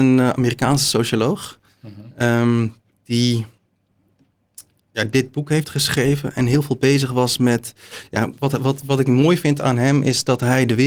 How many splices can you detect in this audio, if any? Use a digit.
0